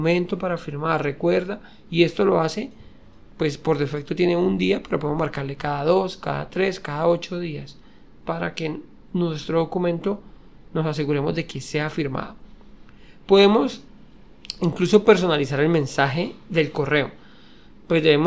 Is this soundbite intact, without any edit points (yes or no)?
yes